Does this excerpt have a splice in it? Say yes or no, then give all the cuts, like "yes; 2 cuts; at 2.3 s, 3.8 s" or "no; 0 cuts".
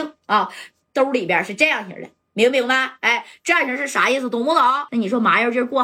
yes; 1 cut; at 4.9 s